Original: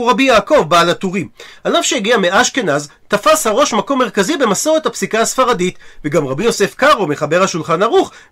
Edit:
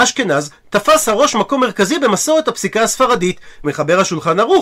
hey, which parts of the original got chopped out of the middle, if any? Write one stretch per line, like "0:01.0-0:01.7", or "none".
0:06.0-0:07.1